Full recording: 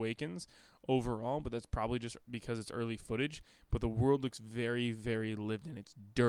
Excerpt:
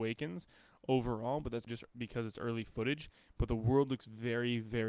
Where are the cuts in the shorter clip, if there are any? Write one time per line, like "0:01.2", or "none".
0:01.7